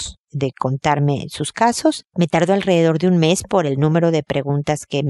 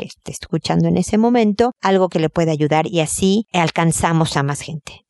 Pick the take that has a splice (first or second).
first